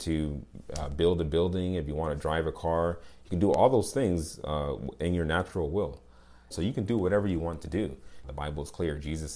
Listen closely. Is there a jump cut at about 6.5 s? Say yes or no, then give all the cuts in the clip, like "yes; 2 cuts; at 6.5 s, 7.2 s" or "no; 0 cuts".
yes; 2 cuts; at 6.5 s, 8.2 s